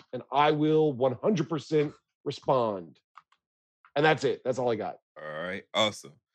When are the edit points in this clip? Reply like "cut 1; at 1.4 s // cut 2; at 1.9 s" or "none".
cut 1; at 5.0 s